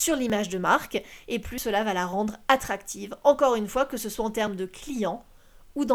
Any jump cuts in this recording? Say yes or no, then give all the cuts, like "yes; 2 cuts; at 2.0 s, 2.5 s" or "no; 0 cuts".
no; 0 cuts